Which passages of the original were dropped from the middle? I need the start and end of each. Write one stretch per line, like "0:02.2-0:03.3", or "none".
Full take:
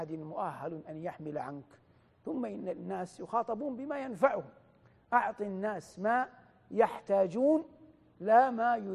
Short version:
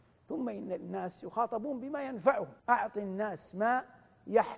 0:04.6-0:05.0